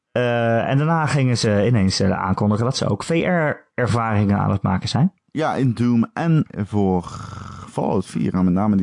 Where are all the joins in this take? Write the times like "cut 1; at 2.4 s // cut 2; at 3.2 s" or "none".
cut 1; at 6.5 s